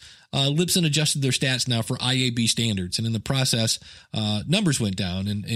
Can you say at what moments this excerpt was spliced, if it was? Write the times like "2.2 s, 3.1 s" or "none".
none